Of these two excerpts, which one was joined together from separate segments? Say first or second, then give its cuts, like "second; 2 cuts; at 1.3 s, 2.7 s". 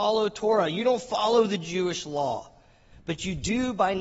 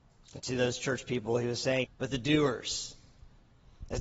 second; 1 cut; at 1.8 s